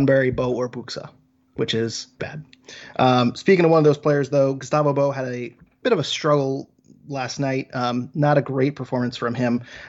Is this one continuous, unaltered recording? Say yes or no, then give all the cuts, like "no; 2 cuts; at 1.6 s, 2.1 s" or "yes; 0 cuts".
no; 1 cut; at 2.2 s